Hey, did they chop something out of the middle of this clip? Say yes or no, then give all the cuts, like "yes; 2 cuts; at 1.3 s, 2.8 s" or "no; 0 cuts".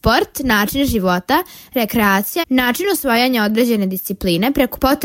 yes; 1 cut; at 2.4 s